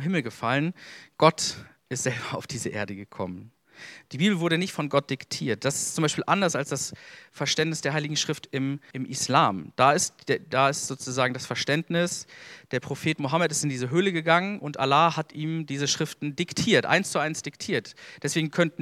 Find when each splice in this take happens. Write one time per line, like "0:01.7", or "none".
0:08.9